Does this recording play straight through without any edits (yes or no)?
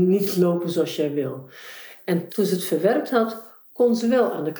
no